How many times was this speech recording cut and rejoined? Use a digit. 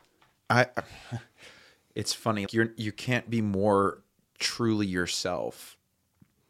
1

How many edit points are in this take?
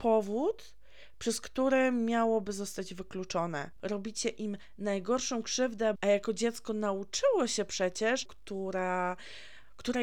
3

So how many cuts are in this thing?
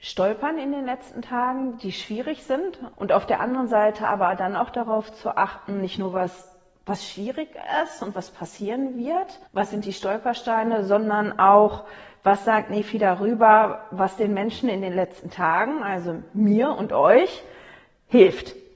2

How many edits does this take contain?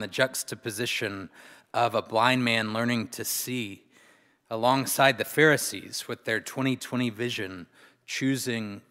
0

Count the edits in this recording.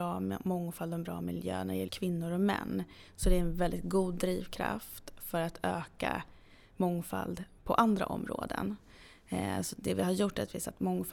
1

